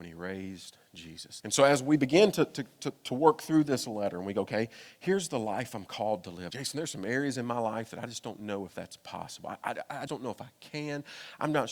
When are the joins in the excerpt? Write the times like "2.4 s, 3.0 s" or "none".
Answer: 1.4 s, 6.5 s, 10.1 s